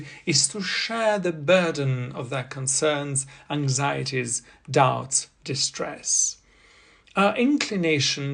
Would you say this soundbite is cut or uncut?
uncut